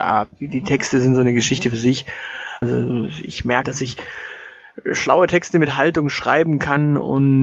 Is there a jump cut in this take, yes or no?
yes